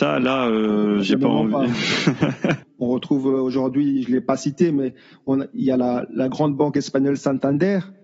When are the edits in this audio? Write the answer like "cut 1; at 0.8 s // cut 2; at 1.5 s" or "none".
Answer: cut 1; at 2.6 s